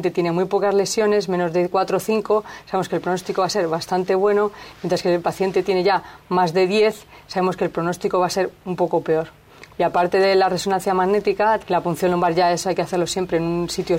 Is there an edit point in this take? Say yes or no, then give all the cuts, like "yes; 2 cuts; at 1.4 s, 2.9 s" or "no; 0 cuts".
yes; 2 cuts; at 9.7 s, 11.6 s